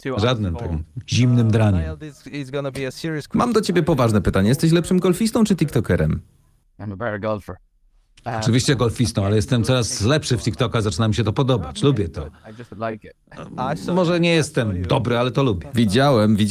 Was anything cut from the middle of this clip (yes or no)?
no